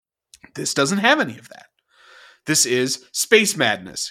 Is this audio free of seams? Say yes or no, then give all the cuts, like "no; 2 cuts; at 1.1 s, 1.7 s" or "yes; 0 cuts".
yes; 0 cuts